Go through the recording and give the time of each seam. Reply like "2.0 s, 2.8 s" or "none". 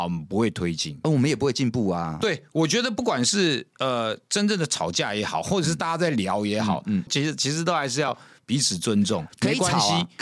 2.2 s, 7.1 s, 9.3 s